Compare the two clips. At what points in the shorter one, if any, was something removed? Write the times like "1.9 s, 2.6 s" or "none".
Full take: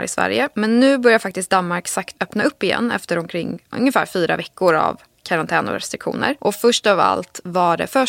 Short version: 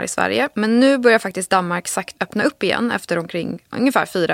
none